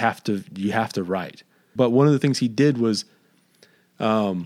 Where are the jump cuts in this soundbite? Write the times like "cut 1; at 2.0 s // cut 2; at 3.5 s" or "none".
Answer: cut 1; at 1.8 s